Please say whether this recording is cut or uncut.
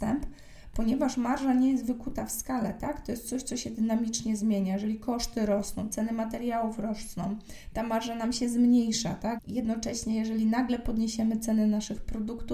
cut